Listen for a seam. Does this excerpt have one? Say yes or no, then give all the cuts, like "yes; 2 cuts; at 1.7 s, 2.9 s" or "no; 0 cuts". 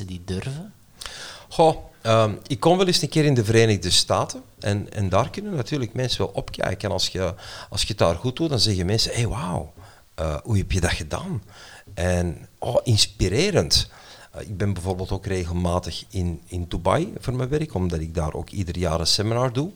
no; 0 cuts